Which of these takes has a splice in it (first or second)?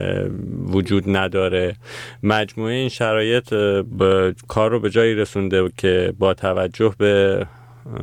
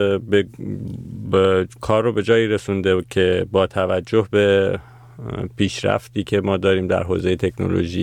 first